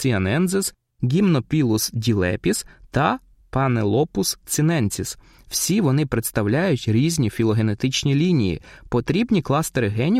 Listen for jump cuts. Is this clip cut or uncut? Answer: uncut